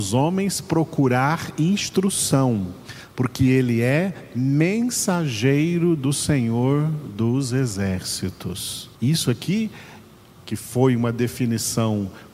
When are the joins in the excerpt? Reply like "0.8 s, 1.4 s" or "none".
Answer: 9.0 s

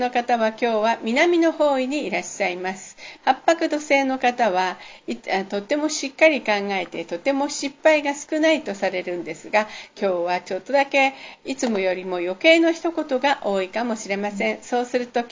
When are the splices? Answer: 3.2 s

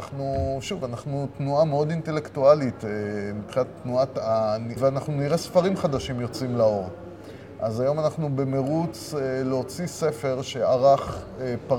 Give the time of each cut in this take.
4.8 s

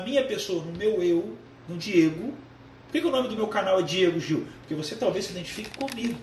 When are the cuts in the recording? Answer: none

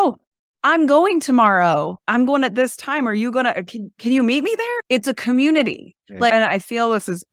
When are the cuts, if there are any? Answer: 6.0 s

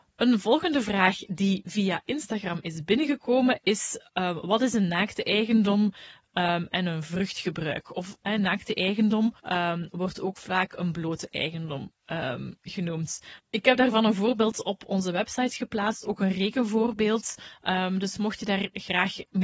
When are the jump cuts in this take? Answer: 9.4 s, 13.4 s

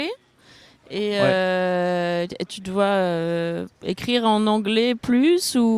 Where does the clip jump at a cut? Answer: 2.5 s, 3.7 s

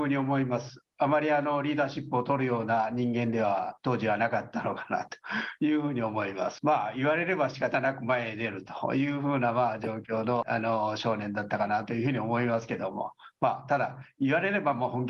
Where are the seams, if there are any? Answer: 6.6 s, 10.4 s

